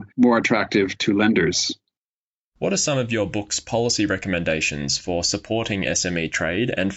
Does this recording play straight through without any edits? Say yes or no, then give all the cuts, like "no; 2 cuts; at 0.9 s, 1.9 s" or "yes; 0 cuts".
yes; 0 cuts